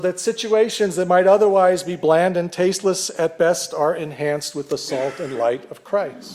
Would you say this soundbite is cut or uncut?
uncut